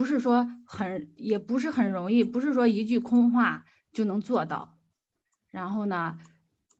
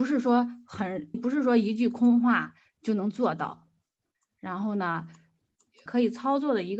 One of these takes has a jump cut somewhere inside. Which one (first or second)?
second